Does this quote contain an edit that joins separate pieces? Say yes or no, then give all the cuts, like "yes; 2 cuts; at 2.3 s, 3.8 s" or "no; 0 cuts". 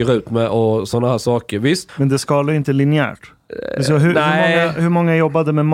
yes; 1 cut; at 1.9 s